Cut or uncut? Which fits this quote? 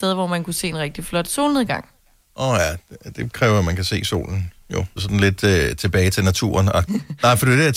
cut